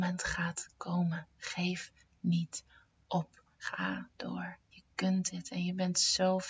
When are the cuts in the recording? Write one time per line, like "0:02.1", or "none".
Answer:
0:03.6
0:04.6